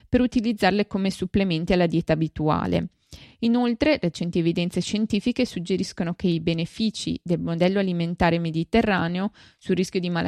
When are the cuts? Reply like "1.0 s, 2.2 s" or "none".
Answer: none